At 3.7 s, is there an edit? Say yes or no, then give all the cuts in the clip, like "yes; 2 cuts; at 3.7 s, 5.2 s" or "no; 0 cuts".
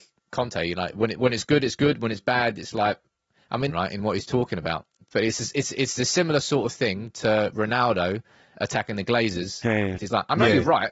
yes; 2 cuts; at 3.7 s, 10.0 s